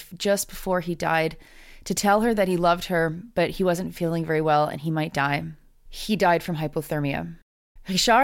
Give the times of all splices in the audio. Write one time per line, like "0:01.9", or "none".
none